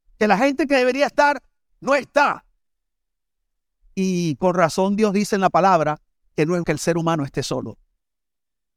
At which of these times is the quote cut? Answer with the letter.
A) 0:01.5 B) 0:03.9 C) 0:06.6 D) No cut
C